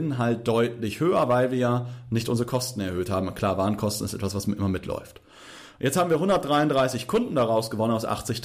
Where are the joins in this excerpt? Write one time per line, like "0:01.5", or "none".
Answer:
none